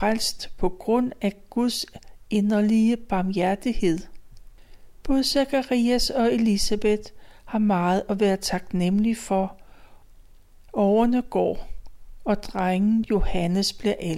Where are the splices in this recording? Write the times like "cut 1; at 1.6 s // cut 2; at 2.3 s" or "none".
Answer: none